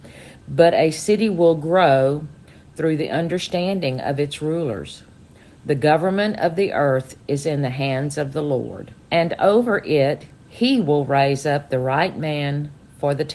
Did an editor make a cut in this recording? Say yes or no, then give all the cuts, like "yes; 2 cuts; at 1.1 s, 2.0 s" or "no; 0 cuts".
yes; 1 cut; at 9.0 s